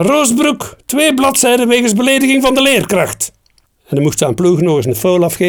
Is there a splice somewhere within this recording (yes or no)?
no